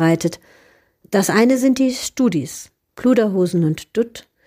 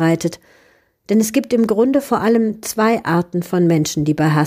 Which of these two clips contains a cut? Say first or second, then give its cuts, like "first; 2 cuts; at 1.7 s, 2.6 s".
first; 2 cuts; at 1.0 s, 2.9 s